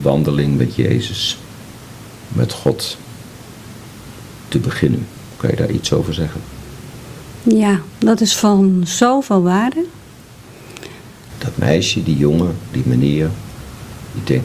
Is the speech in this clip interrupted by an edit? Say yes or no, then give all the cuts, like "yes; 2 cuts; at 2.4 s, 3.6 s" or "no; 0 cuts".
yes; 2 cuts; at 11.3 s, 12.7 s